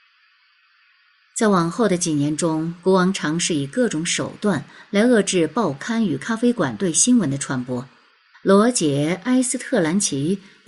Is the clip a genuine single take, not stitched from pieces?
no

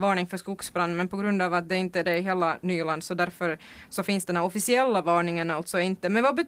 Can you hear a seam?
no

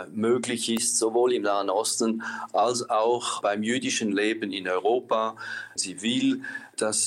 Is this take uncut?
no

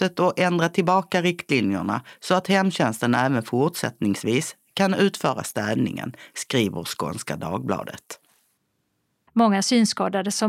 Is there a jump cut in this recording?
yes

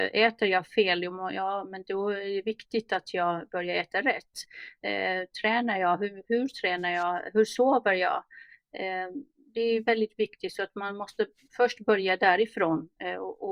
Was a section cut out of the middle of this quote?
no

